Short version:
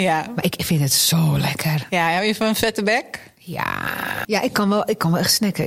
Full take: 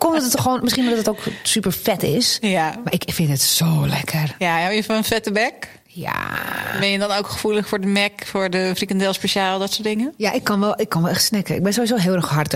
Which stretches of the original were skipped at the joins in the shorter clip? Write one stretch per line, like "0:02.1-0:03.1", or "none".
0:06.7-0:10.2